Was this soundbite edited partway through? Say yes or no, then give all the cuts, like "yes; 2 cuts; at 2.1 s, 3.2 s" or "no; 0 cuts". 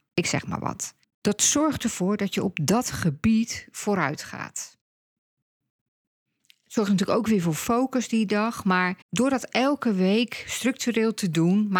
yes; 2 cuts; at 1.0 s, 9.0 s